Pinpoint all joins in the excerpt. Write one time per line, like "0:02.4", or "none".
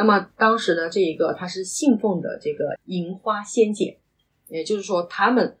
0:02.8